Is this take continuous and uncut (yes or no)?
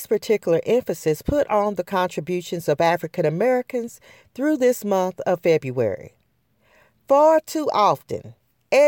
yes